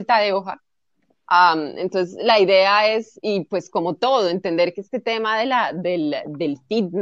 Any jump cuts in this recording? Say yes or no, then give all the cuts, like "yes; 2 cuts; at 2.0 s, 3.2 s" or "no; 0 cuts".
no; 0 cuts